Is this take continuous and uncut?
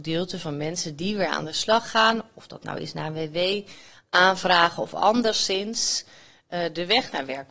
yes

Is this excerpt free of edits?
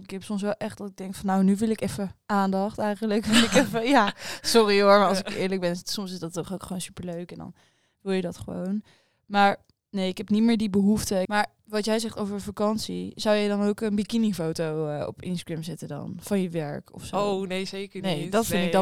no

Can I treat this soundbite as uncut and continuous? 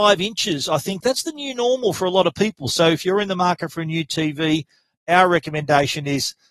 yes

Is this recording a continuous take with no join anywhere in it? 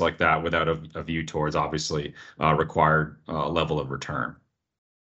yes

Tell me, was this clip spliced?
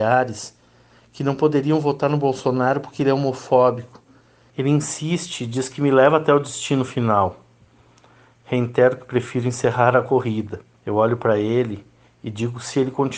yes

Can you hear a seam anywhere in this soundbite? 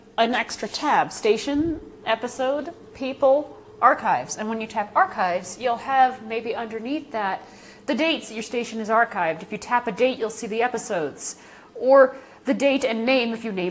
no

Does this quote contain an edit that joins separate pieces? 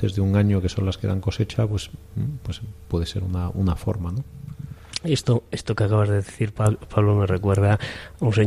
no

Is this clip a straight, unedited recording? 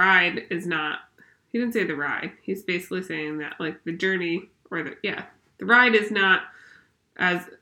yes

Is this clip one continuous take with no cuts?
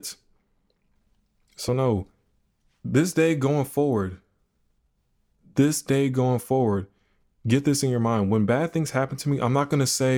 yes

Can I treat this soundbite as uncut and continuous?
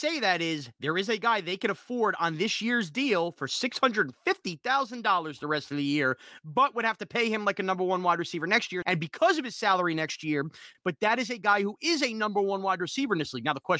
no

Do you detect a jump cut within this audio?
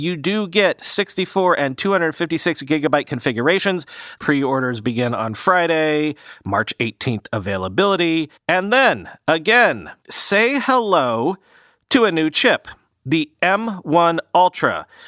yes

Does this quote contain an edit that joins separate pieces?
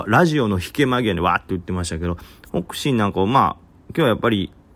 no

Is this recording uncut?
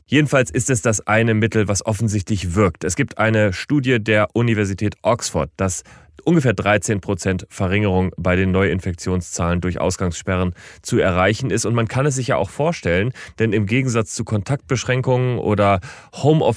no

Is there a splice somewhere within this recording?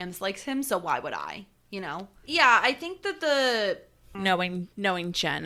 yes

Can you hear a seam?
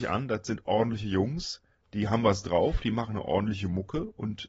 no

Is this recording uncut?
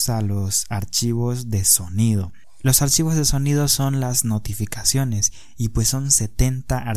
yes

